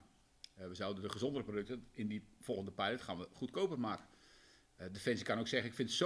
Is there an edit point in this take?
no; 0 cuts

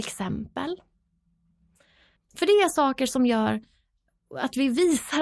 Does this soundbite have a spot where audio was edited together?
yes; 1 cut; at 2.2 s

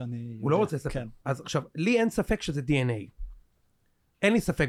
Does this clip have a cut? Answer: yes; 1 cut; at 1.2 s

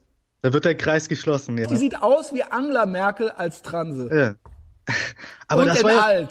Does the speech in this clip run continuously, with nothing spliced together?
no; 1 cut; at 1.6 s

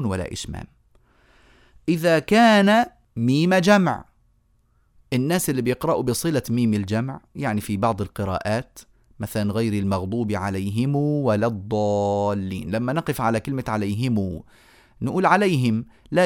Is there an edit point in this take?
no; 0 cuts

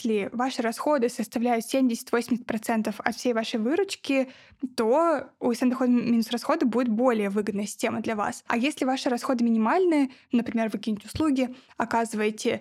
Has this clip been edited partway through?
no; 0 cuts

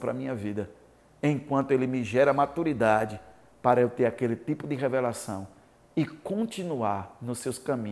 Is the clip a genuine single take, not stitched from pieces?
yes; 0 cuts

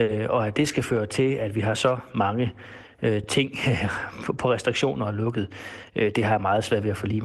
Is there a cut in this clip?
no; 0 cuts

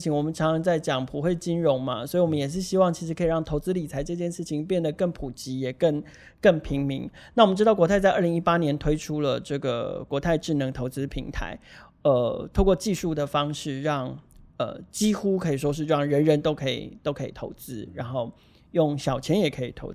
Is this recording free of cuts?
yes; 0 cuts

